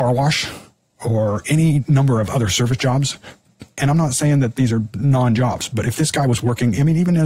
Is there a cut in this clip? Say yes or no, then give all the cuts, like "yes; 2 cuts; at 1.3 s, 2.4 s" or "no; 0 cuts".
no; 0 cuts